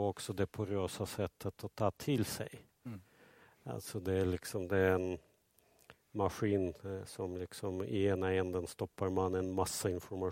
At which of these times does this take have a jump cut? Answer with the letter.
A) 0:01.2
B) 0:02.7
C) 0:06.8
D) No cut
D